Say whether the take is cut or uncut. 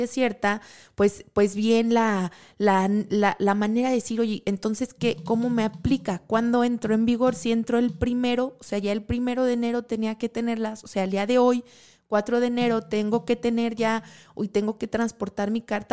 uncut